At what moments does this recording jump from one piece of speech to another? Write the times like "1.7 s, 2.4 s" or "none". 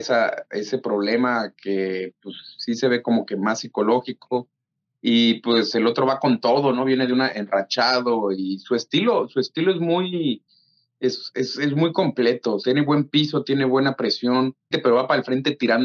14.7 s